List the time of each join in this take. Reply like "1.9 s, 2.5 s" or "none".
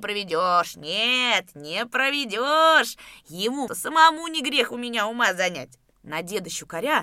3.7 s, 5.9 s